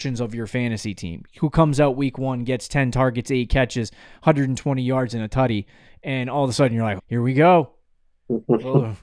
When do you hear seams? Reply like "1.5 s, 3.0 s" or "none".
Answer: 7.0 s